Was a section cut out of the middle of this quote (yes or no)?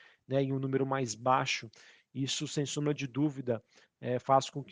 no